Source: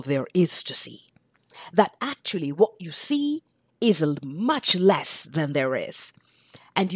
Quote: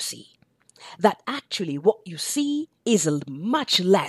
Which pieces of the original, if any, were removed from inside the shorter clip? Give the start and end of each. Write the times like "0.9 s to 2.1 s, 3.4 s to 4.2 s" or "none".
3.5 s to 3.7 s